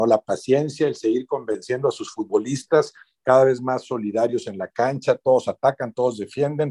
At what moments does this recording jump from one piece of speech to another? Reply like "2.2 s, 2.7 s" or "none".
none